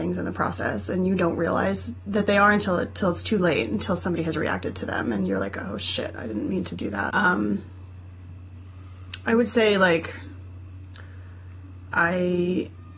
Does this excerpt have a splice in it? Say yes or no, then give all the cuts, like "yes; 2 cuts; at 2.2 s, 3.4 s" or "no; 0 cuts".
yes; 1 cut; at 7.1 s